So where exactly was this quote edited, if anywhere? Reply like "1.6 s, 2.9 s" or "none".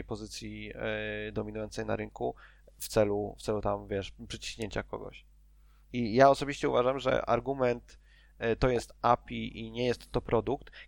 none